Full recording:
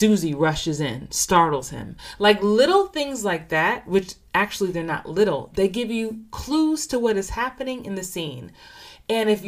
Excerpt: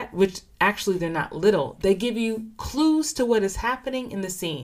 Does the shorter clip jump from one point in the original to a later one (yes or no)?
no